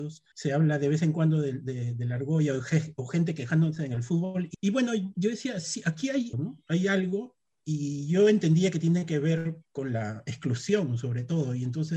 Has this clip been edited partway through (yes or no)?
yes